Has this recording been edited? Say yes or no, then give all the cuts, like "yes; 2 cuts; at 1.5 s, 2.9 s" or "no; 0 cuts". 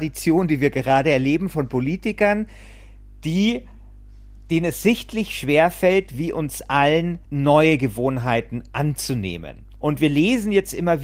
yes; 2 cuts; at 7.2 s, 9.7 s